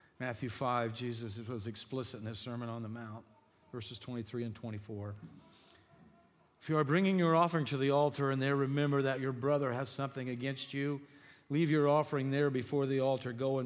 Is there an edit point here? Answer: no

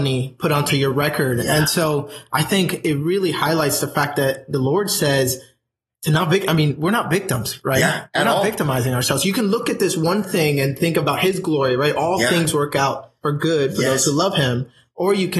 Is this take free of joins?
yes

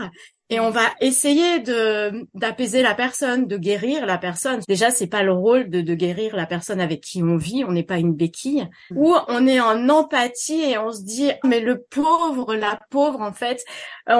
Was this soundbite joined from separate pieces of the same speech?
yes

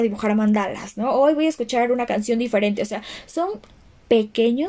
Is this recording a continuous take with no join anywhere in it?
yes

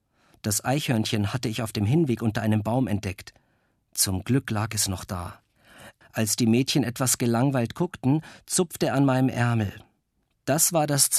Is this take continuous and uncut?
no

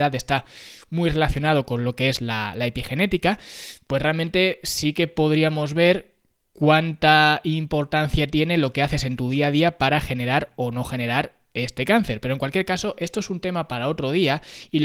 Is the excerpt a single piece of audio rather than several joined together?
yes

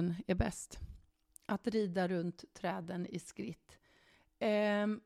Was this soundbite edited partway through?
no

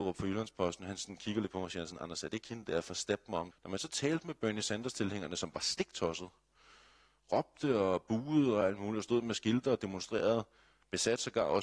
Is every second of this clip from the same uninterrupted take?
no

